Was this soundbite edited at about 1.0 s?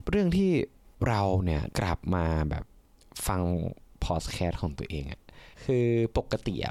no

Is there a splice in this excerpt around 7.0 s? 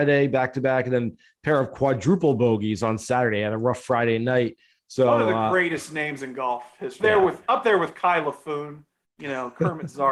yes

